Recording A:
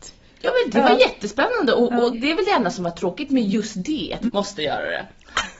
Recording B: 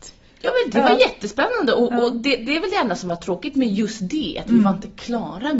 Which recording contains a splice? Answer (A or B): A